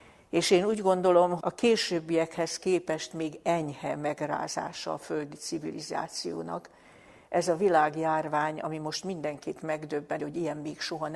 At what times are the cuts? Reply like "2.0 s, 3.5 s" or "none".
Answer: 1.4 s, 10.2 s